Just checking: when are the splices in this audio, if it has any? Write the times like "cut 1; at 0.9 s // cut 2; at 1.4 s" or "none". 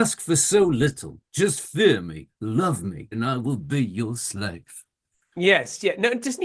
cut 1; at 3.1 s